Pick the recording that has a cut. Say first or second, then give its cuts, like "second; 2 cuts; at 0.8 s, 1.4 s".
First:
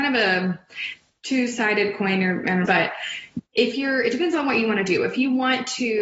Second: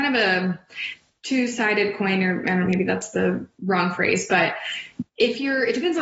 first; 1 cut; at 2.7 s